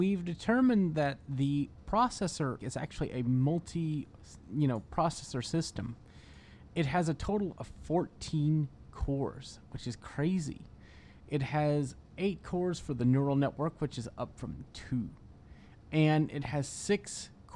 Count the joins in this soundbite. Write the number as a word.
one